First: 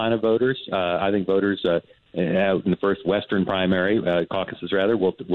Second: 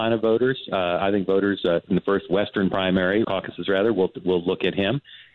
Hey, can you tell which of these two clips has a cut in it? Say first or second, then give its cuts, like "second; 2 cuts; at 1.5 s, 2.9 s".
second; 2 cuts; at 1.9 s, 3.2 s